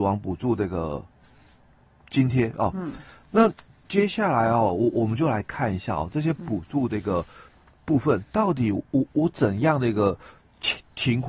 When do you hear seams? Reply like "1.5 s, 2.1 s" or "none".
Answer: none